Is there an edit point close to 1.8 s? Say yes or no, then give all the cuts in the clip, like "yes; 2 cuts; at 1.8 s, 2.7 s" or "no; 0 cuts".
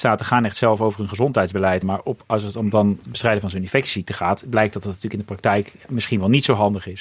yes; 1 cut; at 1.8 s